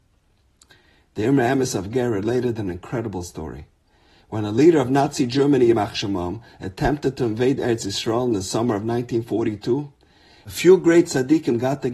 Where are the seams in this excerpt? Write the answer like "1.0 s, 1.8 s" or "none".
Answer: none